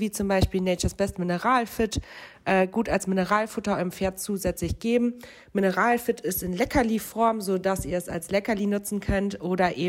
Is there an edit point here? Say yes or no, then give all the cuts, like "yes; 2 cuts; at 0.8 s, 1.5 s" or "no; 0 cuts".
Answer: no; 0 cuts